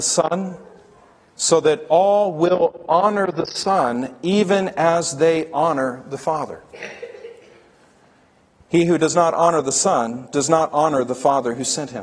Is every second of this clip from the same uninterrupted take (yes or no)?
yes